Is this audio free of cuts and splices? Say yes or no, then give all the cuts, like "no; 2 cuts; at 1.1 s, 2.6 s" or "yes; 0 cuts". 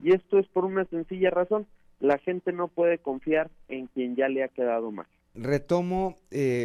no; 1 cut; at 5.4 s